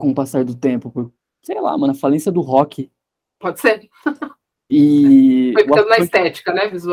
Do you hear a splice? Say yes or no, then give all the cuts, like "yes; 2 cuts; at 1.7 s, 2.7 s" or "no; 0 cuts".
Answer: no; 0 cuts